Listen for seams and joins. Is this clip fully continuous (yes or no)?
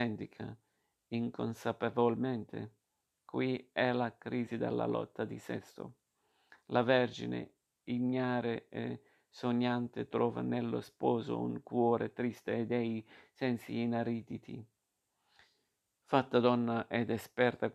yes